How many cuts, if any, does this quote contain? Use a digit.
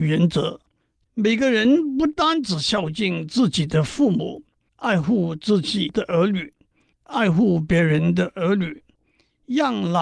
2